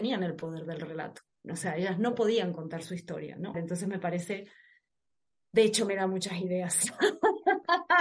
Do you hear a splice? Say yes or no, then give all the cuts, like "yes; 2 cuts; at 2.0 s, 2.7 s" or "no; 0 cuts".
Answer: yes; 1 cut; at 3.5 s